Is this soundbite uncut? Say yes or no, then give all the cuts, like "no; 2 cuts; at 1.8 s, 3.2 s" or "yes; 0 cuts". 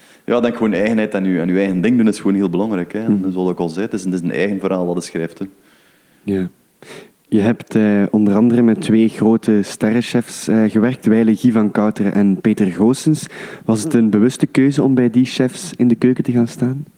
yes; 0 cuts